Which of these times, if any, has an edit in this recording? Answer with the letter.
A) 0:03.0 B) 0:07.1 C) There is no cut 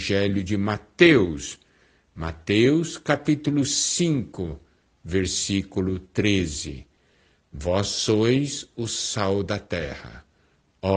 C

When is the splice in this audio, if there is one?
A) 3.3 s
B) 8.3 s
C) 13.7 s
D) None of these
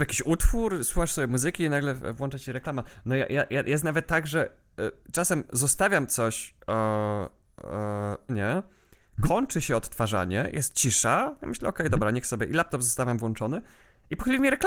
B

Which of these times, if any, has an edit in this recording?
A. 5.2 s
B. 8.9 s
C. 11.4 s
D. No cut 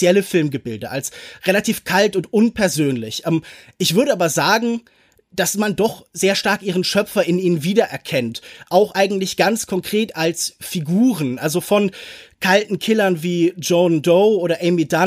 D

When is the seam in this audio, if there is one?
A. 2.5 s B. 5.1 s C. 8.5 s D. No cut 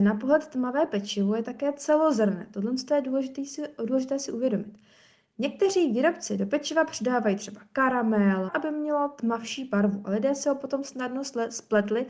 C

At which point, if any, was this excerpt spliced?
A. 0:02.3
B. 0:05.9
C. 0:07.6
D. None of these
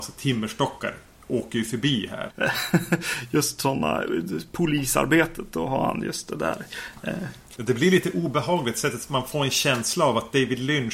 A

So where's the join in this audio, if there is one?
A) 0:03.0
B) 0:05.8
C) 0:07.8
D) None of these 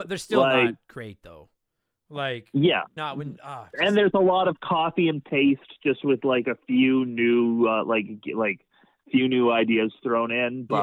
A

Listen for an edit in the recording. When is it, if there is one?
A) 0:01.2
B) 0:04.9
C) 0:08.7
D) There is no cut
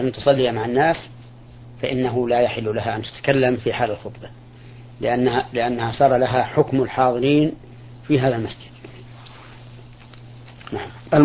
D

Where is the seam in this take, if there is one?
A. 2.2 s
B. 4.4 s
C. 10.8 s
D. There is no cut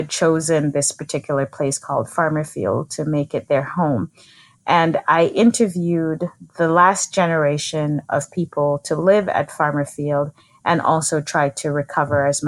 D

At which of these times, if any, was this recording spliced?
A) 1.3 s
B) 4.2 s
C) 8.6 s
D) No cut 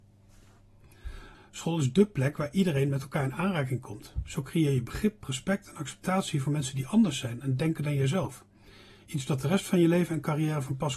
A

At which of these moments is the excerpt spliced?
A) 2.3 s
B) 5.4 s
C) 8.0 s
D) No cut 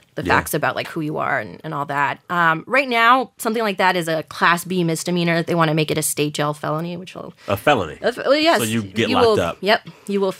D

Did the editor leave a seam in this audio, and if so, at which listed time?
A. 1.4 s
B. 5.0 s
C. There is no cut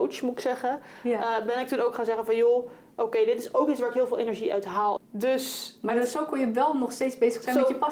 B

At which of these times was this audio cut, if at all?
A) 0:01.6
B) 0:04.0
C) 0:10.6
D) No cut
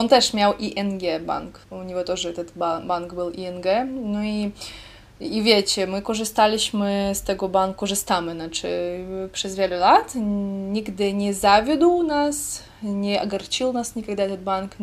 A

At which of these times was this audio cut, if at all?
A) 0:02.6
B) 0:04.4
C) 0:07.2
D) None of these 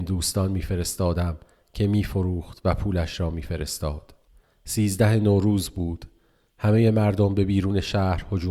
B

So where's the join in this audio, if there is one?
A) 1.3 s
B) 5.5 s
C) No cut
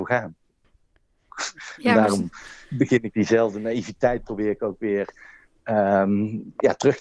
A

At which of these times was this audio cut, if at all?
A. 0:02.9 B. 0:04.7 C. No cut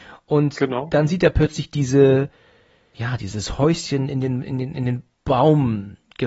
A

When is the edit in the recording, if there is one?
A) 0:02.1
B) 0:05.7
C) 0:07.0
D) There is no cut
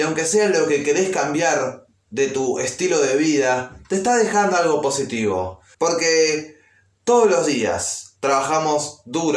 B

